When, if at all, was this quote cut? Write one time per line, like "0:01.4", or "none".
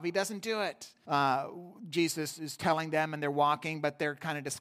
0:01.0